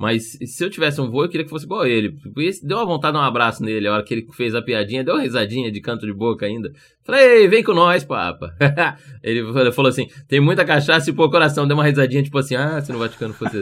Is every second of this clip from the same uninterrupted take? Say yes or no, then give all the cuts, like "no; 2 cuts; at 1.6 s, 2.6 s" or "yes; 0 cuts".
yes; 0 cuts